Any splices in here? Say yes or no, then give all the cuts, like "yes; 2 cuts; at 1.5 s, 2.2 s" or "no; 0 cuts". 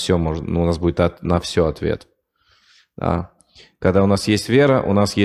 no; 0 cuts